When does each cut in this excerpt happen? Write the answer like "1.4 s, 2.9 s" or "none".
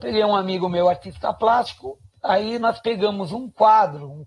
none

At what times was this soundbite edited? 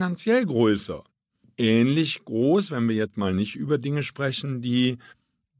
none

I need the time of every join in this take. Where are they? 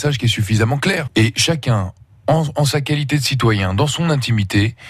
1.1 s

